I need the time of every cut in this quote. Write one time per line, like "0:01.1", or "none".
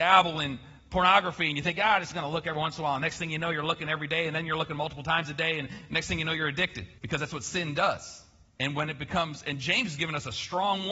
0:07.0
0:08.6